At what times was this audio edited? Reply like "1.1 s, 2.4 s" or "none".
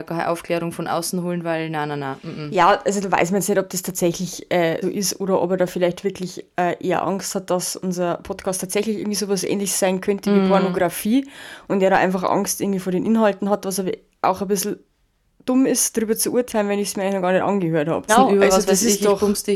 4.8 s, 18.1 s